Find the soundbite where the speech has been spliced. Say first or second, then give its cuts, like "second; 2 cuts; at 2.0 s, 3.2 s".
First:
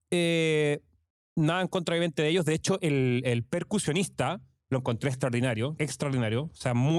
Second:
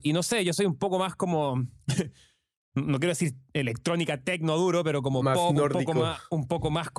first; 1 cut; at 5.8 s